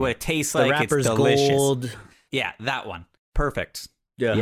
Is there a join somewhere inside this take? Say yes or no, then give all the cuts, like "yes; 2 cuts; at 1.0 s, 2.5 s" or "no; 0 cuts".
yes; 1 cut; at 2.3 s